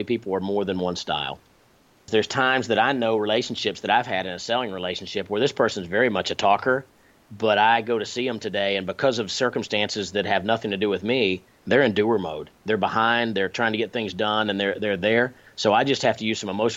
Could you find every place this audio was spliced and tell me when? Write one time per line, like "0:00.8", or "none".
none